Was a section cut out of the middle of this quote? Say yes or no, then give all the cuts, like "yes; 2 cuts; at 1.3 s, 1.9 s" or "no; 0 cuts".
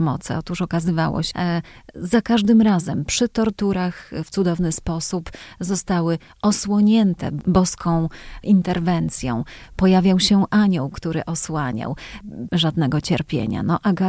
yes; 2 cuts; at 1.3 s, 12.5 s